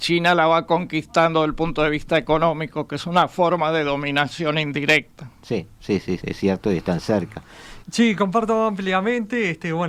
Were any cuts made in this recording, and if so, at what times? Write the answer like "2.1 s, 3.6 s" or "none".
6.2 s, 7.8 s